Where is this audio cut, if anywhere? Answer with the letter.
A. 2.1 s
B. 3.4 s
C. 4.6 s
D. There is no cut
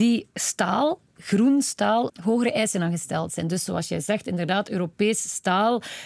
A